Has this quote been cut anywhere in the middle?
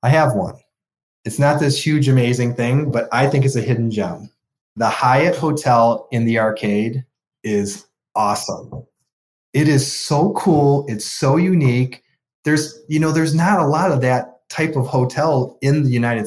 no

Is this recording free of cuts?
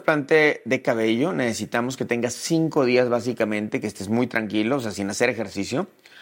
yes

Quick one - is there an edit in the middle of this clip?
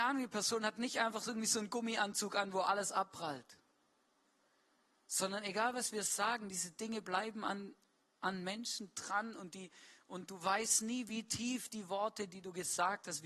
no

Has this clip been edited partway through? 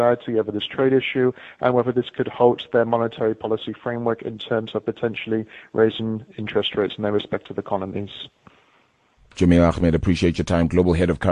no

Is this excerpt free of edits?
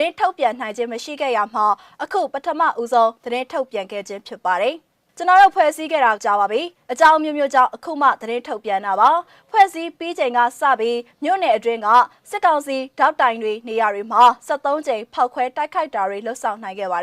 no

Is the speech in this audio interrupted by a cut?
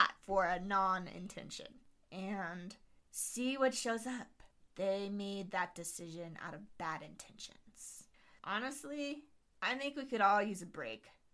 yes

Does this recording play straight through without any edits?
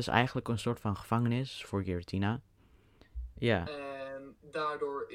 no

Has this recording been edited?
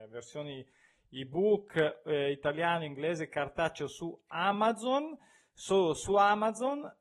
no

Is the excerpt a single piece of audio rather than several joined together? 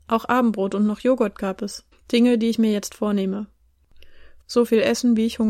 no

